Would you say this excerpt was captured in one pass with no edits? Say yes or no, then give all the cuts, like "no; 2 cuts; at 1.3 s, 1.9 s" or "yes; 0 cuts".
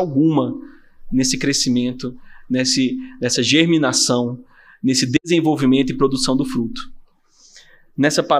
yes; 0 cuts